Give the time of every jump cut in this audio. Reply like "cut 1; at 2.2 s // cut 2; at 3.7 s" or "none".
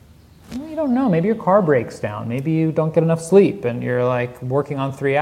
none

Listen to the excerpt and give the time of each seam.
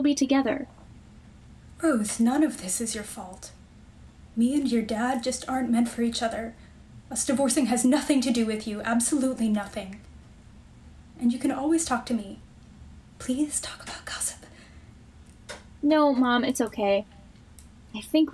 cut 1; at 13.1 s

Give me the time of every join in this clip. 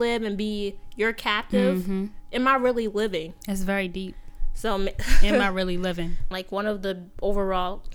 cut 1; at 6.3 s

